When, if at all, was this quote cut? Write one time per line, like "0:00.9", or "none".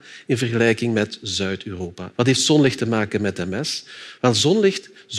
0:02.1